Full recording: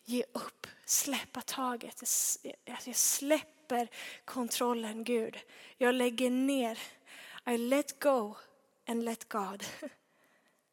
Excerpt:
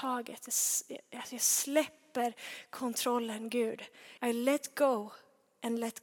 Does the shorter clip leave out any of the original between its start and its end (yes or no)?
yes